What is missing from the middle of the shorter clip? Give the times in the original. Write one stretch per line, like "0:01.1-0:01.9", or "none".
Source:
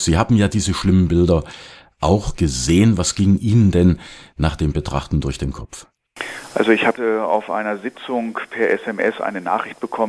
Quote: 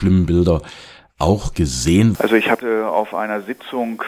0:03.0-0:06.5